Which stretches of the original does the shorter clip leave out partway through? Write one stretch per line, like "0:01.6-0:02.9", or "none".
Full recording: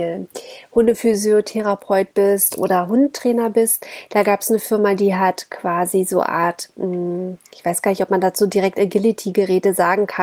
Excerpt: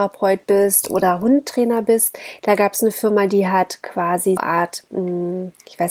0:06.0-0:06.2